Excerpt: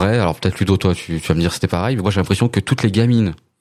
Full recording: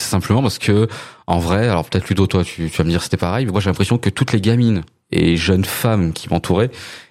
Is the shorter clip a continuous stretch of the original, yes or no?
yes